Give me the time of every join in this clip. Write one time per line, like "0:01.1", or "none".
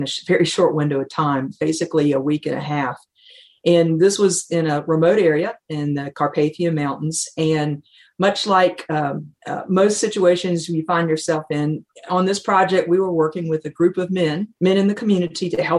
0:11.9
0:14.6